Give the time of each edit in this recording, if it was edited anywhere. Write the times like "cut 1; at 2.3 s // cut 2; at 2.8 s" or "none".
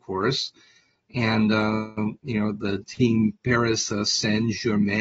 none